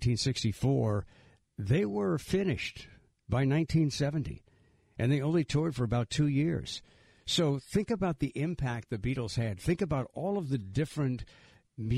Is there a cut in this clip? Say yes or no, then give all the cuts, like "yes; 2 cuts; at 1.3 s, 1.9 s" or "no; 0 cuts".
no; 0 cuts